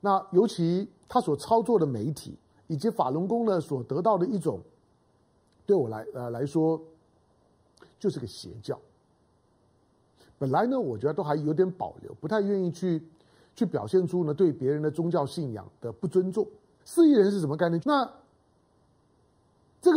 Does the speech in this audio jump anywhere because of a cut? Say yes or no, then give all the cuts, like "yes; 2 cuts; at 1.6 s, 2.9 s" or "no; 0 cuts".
yes; 2 cuts; at 16.8 s, 17.8 s